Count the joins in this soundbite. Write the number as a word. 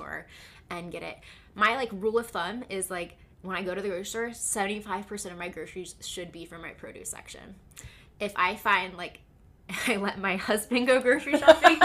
one